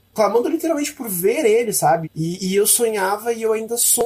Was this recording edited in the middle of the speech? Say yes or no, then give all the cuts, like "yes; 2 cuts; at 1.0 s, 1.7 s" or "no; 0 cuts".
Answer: yes; 1 cut; at 2.0 s